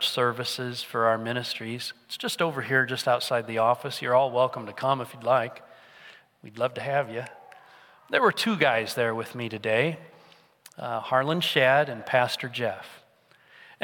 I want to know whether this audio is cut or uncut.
uncut